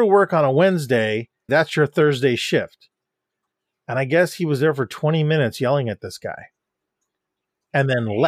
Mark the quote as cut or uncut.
cut